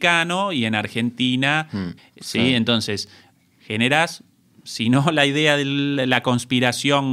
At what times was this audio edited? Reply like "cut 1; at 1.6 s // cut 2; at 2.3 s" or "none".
cut 1; at 2.0 s